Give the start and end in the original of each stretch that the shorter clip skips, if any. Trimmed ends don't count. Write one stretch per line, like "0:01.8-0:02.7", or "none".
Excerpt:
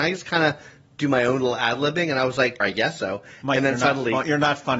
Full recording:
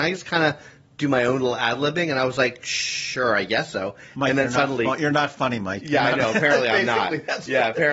0:02.6-0:03.3